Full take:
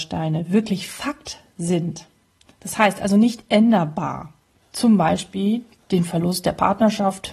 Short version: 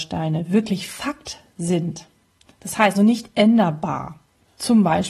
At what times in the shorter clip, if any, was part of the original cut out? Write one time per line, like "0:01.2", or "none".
0:02.9

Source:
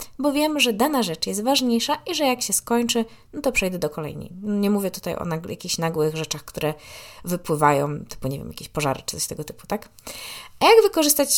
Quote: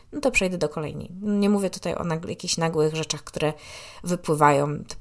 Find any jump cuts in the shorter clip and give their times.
none

